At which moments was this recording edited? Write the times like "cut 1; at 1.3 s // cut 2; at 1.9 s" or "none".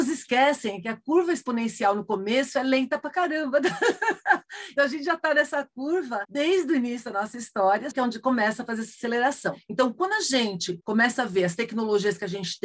cut 1; at 4.8 s // cut 2; at 7.9 s